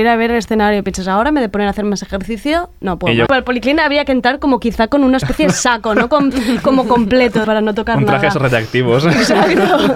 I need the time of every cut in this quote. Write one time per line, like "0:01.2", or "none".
0:03.3
0:07.4